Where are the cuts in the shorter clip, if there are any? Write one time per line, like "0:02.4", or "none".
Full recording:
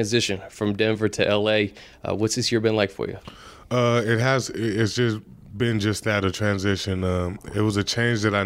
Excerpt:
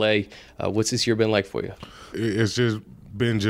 0:02.1

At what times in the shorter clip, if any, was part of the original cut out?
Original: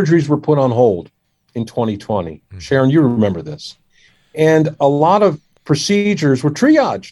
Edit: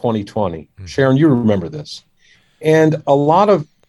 none

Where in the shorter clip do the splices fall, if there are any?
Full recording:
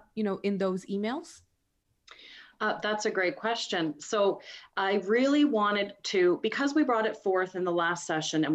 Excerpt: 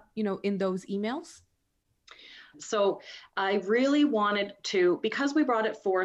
0:02.5

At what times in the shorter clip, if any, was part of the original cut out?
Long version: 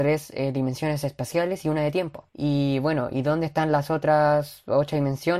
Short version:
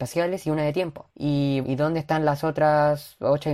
0:01.6

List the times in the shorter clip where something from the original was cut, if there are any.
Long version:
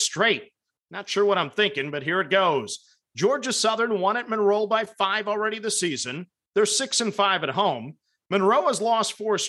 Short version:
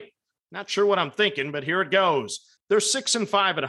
0:02.6

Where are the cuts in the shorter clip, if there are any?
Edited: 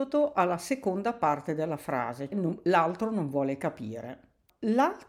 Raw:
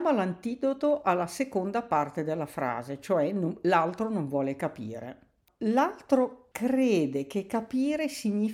0:02.3

